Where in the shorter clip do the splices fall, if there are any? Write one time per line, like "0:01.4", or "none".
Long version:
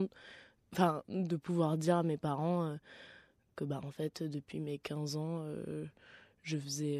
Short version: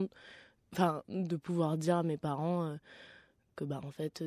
none